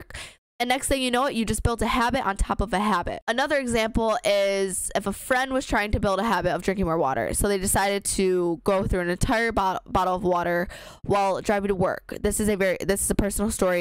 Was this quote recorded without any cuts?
yes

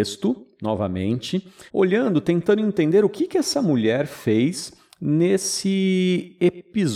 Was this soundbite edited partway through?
yes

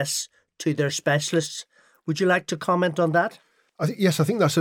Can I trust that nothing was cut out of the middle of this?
yes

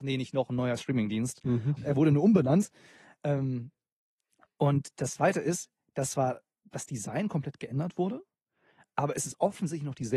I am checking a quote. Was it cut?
yes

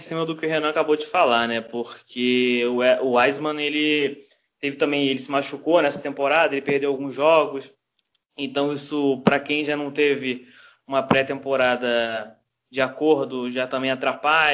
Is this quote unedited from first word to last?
yes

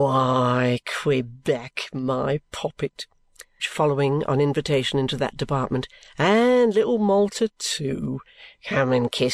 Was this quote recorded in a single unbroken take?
no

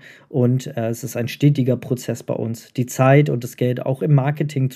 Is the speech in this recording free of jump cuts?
yes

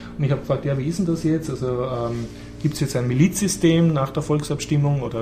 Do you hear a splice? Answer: no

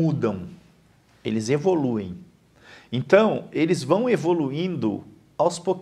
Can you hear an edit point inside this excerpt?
no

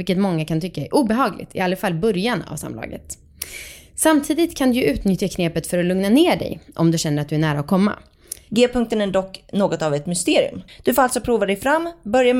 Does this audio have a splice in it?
yes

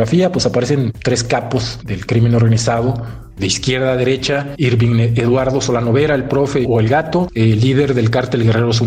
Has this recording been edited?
yes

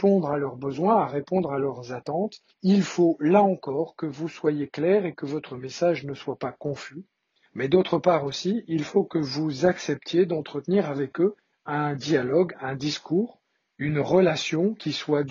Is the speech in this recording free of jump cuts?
yes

